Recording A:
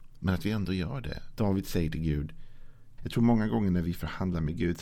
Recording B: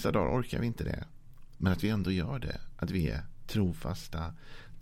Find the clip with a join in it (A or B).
A